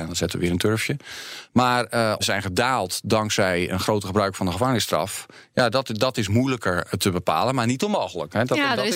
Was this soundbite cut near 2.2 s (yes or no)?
yes